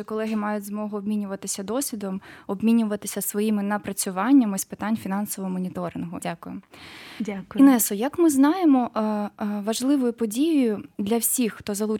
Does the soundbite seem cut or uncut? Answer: cut